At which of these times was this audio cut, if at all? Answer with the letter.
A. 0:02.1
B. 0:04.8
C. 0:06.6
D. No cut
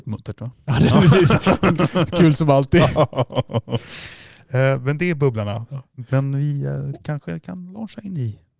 D